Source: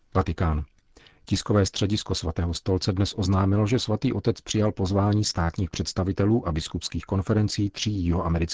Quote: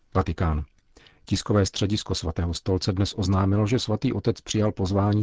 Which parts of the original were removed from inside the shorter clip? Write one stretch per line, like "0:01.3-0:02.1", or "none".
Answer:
none